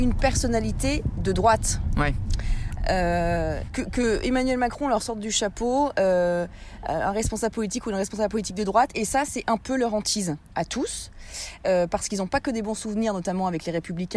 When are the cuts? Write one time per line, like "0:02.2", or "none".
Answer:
0:03.7